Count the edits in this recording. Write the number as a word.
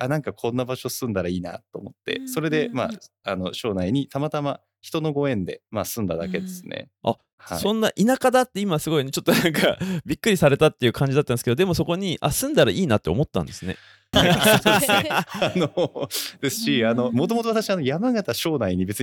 one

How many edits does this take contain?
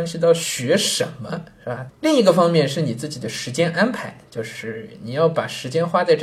one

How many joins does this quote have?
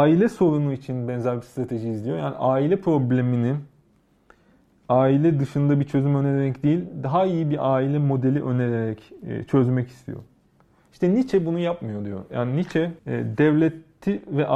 one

